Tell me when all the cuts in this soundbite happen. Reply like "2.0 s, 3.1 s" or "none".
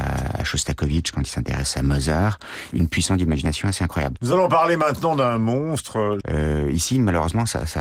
2.7 s, 6.2 s